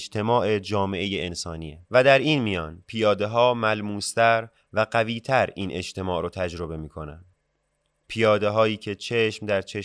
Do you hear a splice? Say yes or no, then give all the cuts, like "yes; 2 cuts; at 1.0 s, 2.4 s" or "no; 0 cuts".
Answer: yes; 1 cut; at 1.8 s